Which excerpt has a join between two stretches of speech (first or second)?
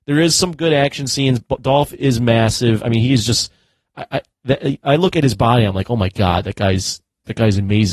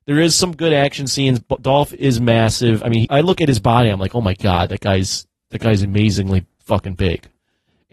second